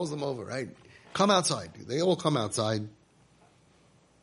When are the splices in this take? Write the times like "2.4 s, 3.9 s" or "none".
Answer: none